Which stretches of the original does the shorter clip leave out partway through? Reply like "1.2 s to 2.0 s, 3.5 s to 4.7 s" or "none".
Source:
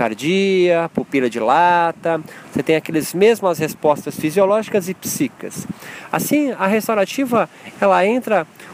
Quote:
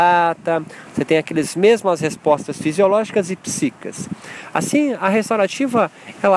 none